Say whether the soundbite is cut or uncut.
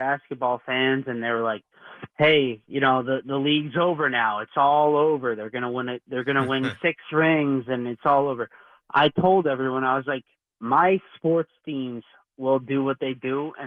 uncut